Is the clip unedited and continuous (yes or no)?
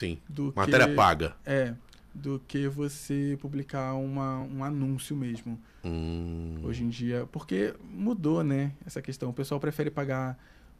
yes